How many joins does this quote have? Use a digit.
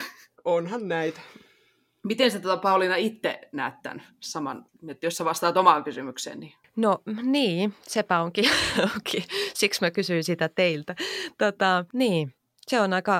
0